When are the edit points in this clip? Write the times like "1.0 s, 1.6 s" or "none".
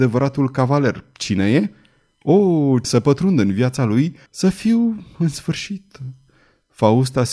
2.8 s, 4.3 s